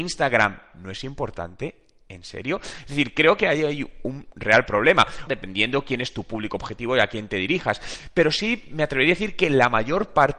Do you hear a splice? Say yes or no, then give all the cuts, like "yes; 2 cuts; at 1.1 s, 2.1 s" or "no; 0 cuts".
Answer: yes; 1 cut; at 5.3 s